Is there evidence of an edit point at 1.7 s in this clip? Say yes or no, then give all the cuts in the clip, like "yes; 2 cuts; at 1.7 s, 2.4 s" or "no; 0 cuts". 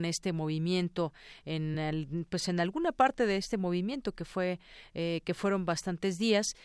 no; 0 cuts